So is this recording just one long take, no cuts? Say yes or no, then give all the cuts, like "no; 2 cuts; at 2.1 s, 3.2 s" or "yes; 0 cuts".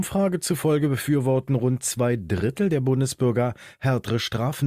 yes; 0 cuts